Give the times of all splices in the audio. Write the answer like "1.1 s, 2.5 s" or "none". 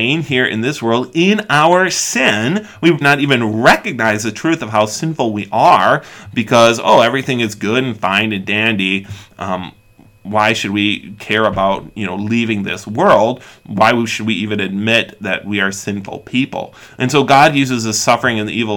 3.0 s